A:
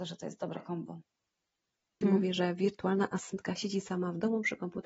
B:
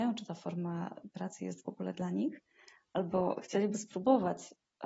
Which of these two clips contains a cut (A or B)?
A